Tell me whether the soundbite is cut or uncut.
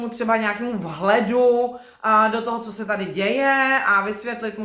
uncut